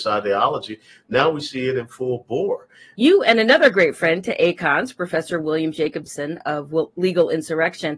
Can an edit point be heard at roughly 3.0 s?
yes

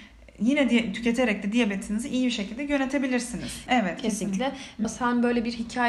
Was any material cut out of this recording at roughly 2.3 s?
no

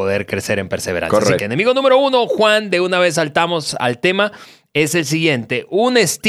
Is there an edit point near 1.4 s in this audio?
yes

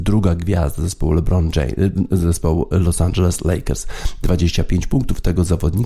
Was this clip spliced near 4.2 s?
no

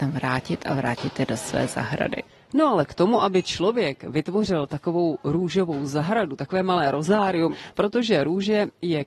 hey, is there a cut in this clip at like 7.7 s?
yes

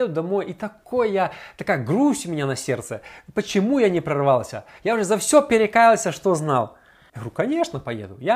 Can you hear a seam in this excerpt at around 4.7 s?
no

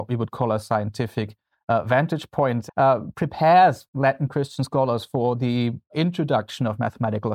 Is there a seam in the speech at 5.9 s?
yes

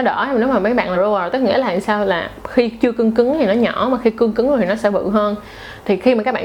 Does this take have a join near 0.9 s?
yes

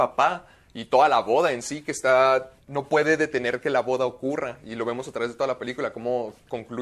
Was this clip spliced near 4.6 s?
no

